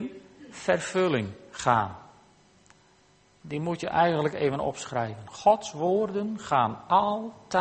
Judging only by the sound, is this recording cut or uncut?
uncut